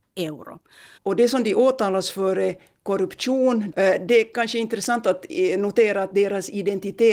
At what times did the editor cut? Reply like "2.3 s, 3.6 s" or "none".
1.0 s, 3.7 s